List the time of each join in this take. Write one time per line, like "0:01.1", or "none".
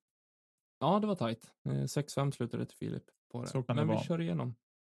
0:03.1